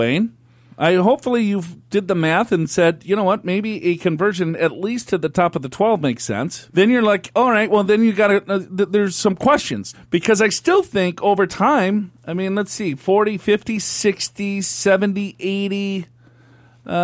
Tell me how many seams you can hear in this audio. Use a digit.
2